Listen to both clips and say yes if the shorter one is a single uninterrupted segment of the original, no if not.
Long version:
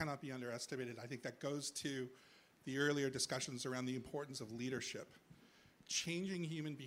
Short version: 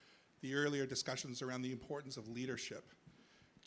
yes